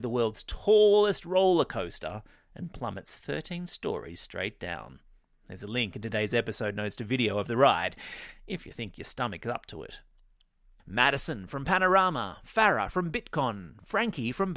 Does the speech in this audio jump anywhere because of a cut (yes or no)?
yes